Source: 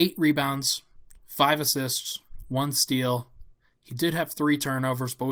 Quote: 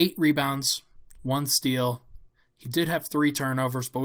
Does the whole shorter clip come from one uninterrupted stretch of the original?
no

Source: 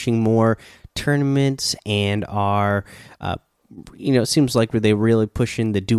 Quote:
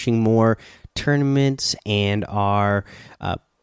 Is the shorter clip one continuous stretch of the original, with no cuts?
yes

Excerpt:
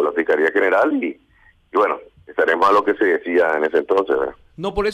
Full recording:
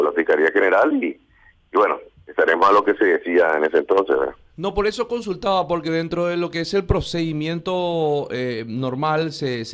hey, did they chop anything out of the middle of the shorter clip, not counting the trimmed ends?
no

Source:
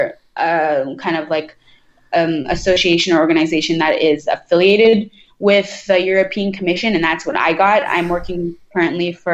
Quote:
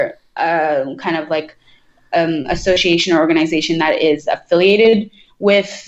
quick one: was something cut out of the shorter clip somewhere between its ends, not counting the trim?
no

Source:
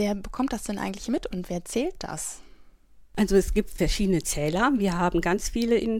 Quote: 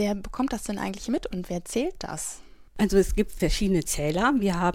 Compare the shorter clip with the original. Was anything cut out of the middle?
yes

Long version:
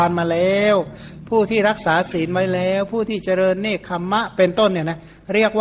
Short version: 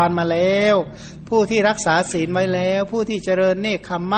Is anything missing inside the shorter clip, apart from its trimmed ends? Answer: no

